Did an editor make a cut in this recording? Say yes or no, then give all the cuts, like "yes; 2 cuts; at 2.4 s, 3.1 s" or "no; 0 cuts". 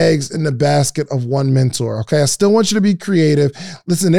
no; 0 cuts